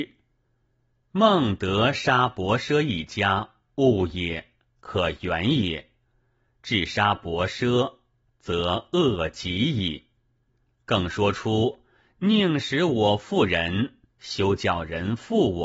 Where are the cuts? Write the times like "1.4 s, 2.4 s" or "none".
1.0 s